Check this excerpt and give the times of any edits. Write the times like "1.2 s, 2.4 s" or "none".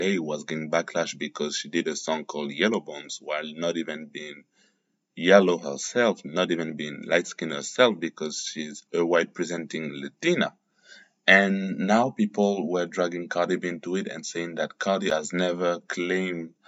8.9 s